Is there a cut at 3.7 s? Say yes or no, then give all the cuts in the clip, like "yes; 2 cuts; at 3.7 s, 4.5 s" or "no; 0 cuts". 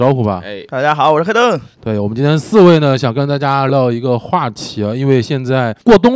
yes; 2 cuts; at 1.8 s, 3.7 s